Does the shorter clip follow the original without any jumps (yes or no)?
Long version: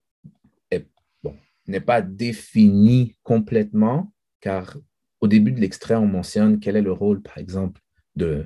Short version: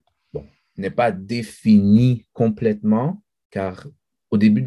yes